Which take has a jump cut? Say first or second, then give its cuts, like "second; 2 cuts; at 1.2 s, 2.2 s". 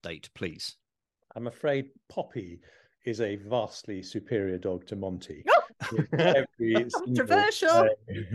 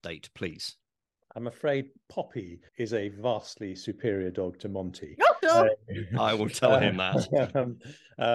second; 2 cuts; at 2.7 s, 5.4 s